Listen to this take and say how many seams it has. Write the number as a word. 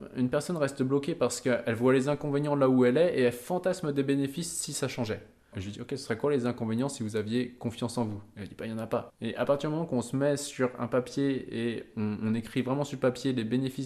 two